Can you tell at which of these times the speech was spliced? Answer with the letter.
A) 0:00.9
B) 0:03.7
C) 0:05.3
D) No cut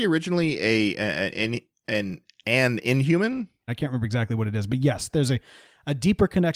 B